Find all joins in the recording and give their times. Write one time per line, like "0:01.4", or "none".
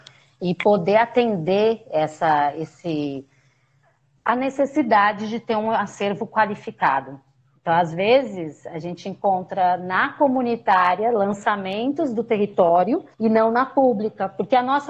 0:13.1